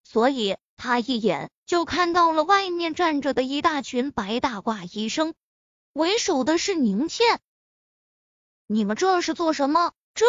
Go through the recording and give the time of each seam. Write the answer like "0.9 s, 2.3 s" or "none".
none